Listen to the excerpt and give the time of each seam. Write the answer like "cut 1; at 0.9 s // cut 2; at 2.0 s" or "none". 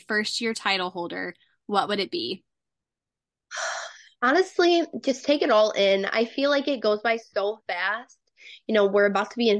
none